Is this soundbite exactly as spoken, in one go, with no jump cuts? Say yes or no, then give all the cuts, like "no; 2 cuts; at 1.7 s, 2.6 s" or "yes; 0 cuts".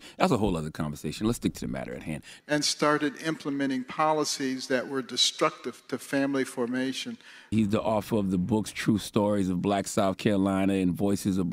no; 2 cuts; at 2.4 s, 7.5 s